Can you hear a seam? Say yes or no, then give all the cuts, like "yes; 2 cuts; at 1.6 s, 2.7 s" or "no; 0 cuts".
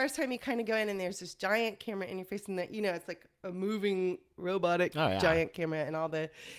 no; 0 cuts